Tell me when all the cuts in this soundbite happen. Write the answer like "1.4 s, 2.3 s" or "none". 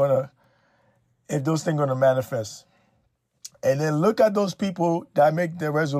none